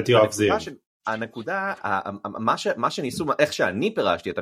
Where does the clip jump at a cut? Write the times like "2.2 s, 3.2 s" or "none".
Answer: 1.0 s